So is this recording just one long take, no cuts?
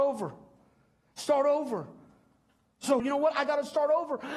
no; 1 cut; at 3.0 s

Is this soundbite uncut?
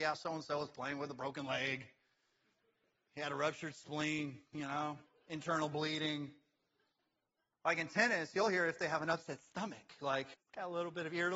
no; 2 cuts; at 7.5 s, 10.3 s

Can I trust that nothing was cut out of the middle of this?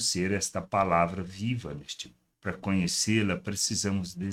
no; 1 cut; at 2.3 s

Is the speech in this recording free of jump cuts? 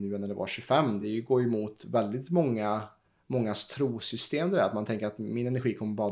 yes; 0 cuts

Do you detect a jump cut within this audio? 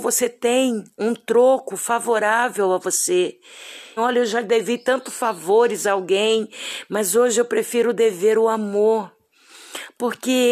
yes; 1 cut; at 4.0 s

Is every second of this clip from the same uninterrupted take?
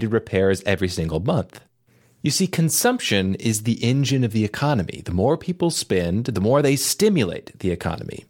yes; 0 cuts

